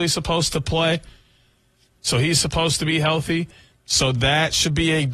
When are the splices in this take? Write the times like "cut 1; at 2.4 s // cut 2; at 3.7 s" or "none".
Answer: cut 1; at 3.7 s